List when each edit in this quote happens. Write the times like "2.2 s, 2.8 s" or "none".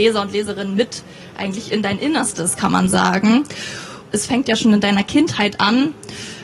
4.1 s